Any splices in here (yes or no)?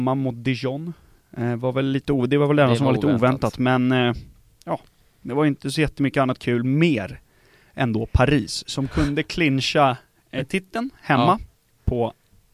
no